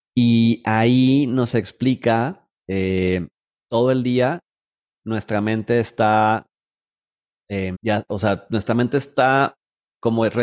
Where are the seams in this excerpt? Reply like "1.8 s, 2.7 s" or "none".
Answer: 3.6 s, 7.7 s